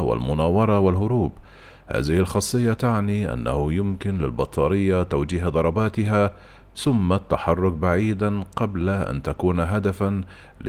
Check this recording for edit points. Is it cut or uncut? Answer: uncut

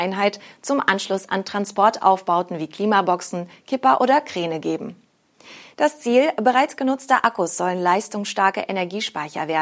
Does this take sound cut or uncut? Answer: cut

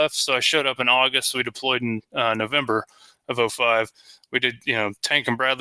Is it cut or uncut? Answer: uncut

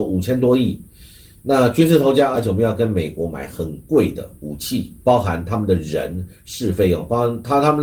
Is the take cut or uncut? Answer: cut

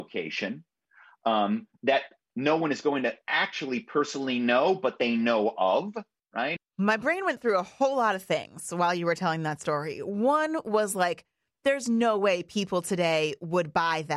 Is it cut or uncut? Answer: cut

